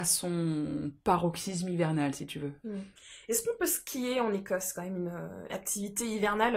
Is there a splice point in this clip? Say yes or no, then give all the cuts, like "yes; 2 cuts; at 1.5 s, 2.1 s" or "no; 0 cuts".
no; 0 cuts